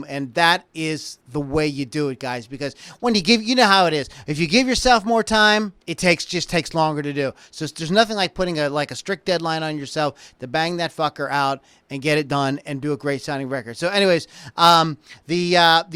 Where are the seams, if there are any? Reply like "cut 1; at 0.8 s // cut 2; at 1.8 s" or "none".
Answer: cut 1; at 5.8 s